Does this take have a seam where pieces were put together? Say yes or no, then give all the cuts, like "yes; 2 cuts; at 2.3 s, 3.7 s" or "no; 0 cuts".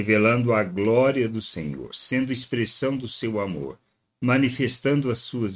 no; 0 cuts